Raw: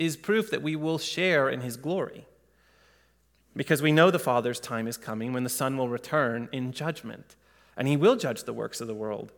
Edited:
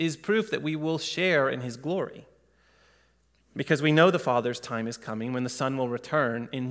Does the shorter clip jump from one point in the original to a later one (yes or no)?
no